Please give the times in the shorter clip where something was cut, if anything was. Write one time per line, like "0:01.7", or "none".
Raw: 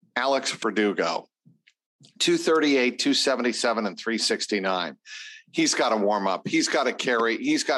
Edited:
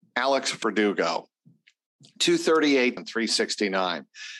0:03.0